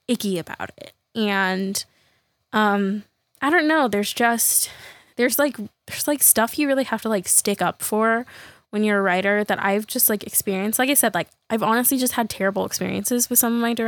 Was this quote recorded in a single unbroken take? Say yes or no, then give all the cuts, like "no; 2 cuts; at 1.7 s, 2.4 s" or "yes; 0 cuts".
yes; 0 cuts